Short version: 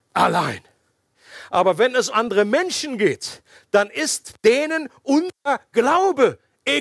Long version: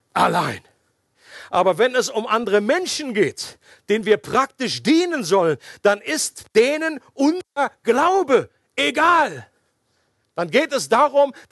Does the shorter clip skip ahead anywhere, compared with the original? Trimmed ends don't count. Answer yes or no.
yes